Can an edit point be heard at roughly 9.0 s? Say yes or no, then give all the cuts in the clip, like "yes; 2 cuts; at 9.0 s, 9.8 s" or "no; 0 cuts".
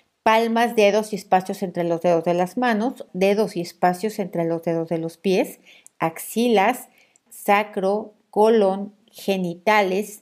yes; 3 cuts; at 3.1 s, 7.3 s, 9.0 s